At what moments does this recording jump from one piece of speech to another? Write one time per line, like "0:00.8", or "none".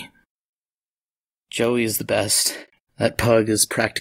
0:02.8